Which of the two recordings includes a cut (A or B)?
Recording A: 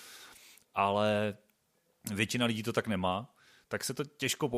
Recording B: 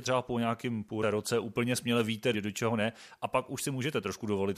B